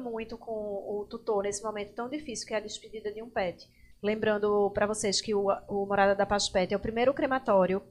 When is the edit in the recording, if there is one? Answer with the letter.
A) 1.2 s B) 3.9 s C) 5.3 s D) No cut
B